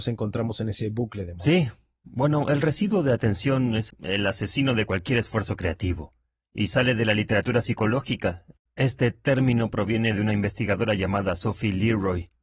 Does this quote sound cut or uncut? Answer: cut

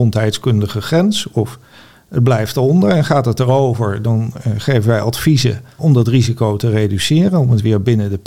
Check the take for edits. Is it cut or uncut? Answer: cut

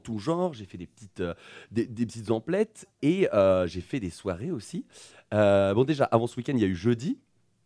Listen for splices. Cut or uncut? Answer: cut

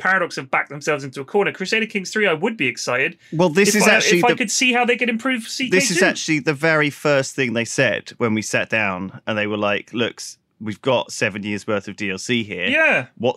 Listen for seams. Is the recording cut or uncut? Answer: uncut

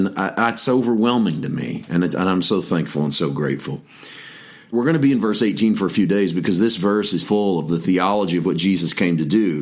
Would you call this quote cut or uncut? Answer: cut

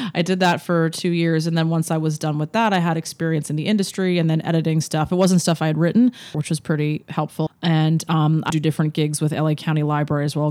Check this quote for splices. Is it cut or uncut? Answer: cut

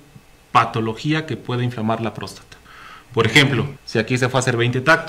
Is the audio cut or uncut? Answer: cut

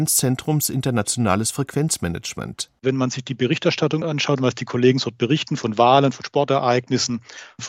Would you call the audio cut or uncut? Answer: uncut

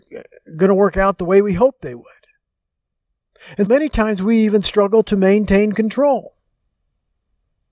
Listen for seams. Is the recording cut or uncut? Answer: cut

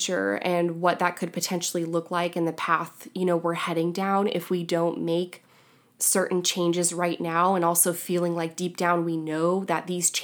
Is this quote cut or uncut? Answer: uncut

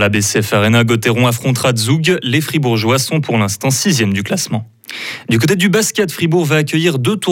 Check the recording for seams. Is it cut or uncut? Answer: uncut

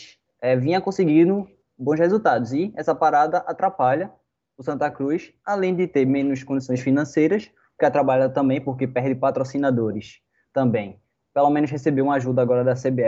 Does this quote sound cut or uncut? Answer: uncut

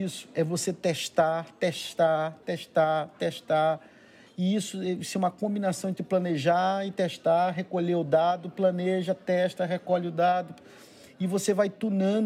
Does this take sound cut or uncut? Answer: cut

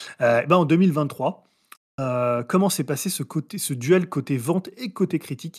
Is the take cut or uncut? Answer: uncut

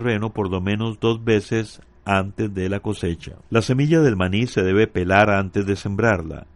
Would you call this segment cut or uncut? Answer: cut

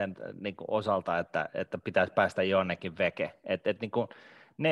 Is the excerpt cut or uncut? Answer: uncut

